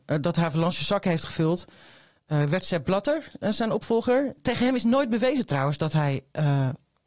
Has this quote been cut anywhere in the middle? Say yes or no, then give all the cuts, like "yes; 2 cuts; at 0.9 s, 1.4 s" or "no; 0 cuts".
no; 0 cuts